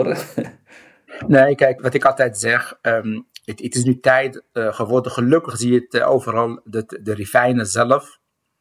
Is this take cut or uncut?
cut